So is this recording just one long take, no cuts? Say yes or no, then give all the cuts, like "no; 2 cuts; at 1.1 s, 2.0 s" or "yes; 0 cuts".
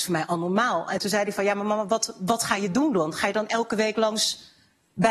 yes; 0 cuts